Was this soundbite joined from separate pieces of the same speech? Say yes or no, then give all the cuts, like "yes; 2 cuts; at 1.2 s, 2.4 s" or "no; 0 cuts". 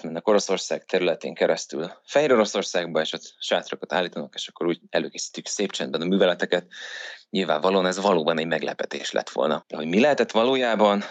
yes; 1 cut; at 9.6 s